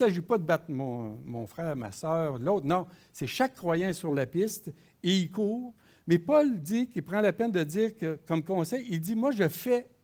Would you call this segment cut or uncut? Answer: uncut